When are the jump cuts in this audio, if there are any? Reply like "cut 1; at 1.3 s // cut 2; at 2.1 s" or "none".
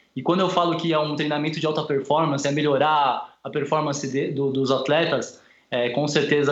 none